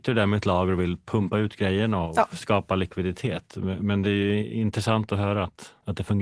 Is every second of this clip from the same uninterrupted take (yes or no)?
yes